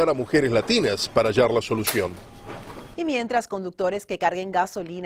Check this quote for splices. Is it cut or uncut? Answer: cut